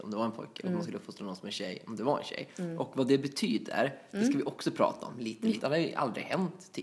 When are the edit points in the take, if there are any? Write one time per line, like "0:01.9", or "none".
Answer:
0:05.6